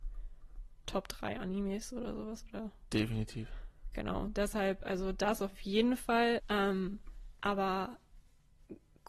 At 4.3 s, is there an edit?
no; 1 cut; at 6.4 s

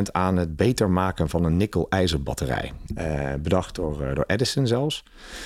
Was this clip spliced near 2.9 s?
yes; 1 cut; at 2.9 s

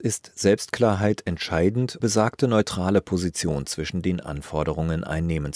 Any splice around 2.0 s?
yes; 1 cut; at 2.0 s

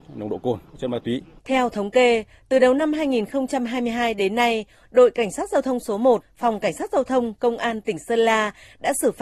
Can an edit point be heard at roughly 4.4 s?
no; 1 cut; at 1.4 s

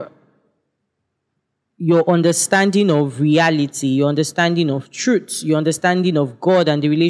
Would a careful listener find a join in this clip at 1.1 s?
no; 0 cuts

